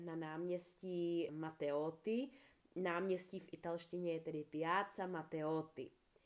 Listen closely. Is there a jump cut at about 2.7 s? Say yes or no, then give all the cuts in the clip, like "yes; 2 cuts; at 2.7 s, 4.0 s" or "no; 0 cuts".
no; 1 cut; at 1.3 s